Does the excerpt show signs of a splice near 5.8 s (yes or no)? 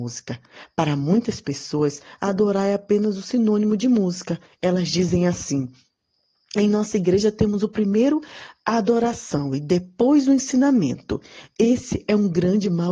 no